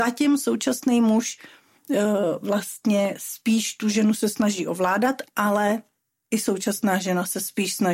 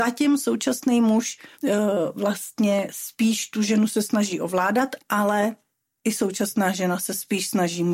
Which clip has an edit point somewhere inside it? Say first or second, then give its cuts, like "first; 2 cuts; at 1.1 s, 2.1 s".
second; 1 cut; at 1.5 s